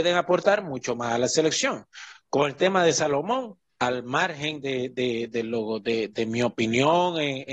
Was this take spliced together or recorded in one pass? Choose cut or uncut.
uncut